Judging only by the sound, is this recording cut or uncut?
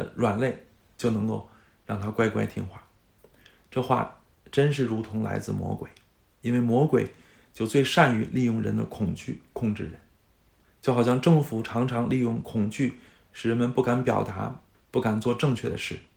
cut